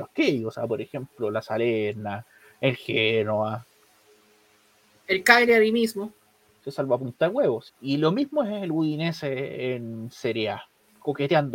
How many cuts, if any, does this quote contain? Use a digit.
2